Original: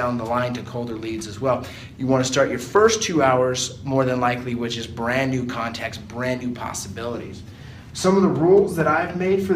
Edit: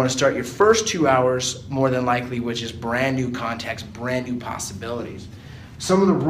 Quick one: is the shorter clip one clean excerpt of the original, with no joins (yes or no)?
yes